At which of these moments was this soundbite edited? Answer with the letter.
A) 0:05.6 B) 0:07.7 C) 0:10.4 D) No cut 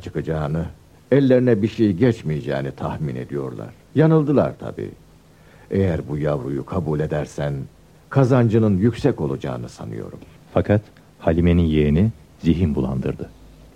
C